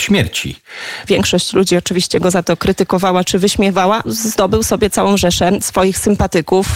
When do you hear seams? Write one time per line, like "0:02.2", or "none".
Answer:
0:01.1
0:04.0

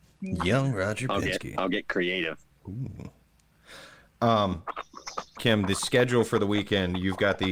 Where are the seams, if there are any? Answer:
0:05.4

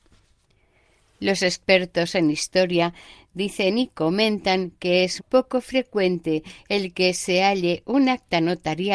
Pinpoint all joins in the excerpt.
0:05.2

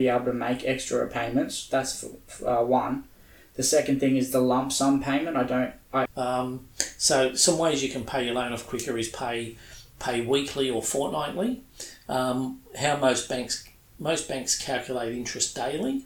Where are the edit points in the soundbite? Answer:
0:06.1

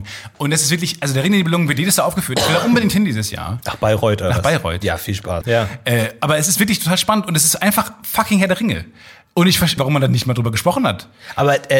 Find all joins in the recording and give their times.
0:05.4
0:09.8

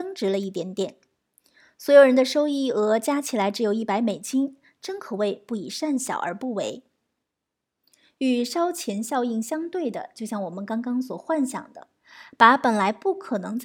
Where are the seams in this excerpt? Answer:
none

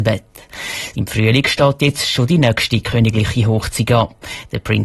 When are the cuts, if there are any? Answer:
0:00.9

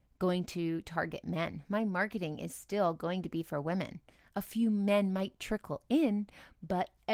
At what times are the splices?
none

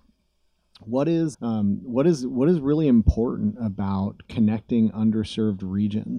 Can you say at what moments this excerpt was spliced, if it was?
0:01.3

